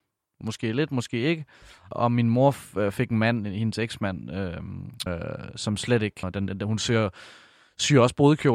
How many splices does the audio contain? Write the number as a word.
two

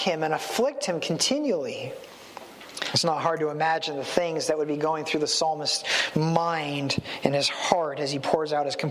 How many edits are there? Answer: one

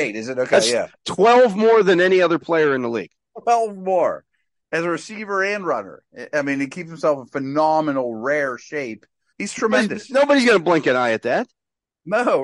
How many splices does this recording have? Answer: one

